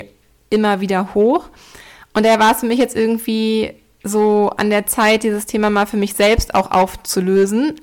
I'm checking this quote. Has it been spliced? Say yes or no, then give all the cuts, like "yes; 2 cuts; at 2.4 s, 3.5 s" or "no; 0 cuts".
no; 0 cuts